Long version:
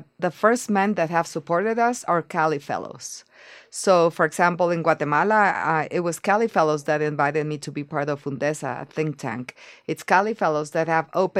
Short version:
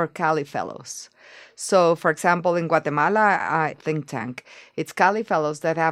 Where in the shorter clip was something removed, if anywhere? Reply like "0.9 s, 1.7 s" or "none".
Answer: 3.7 s